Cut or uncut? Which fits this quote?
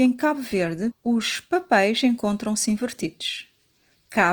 cut